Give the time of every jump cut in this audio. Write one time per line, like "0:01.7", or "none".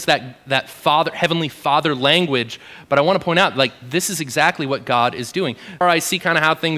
0:05.8